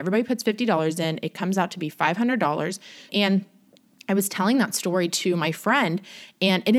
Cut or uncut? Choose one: cut